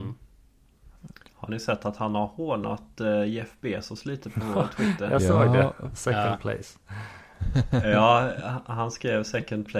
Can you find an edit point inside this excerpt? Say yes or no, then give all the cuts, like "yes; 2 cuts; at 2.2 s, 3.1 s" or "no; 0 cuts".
no; 0 cuts